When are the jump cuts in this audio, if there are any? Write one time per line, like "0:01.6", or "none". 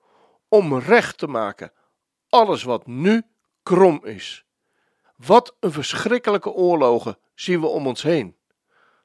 0:05.0

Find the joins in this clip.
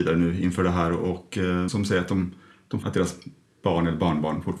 0:01.7
0:02.8

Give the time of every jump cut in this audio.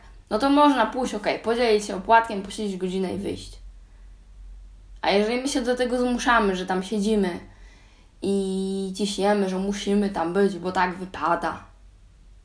none

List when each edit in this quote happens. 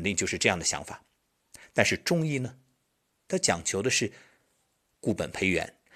none

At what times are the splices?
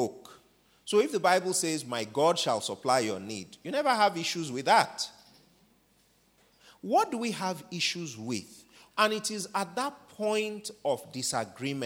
0:08.9

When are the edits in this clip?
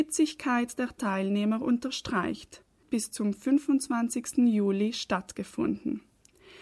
0:02.8

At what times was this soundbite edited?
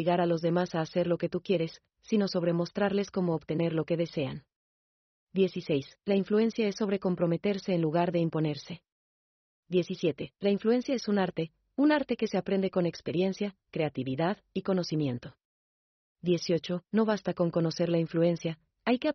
none

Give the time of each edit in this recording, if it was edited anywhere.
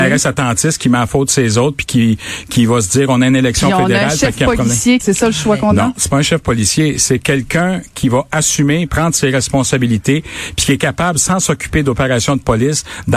0:05.0

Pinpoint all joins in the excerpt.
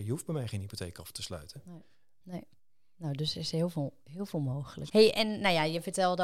0:02.2
0:04.9

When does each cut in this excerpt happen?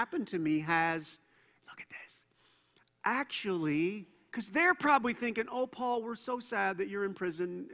none

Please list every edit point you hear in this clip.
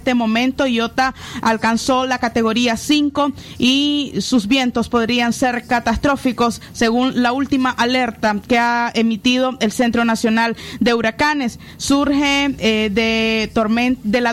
none

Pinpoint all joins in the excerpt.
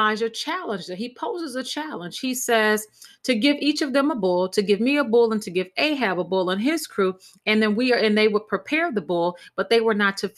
none

